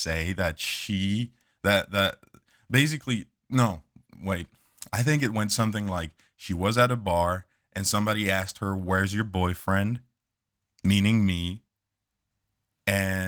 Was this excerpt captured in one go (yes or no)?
yes